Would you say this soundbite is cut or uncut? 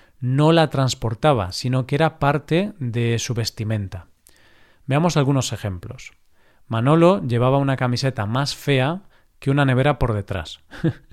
uncut